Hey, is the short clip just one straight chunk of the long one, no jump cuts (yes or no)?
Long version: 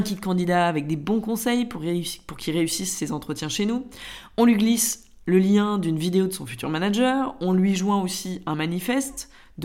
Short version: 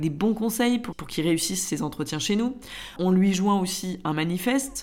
no